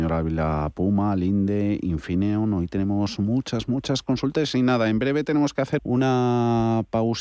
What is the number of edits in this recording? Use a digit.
1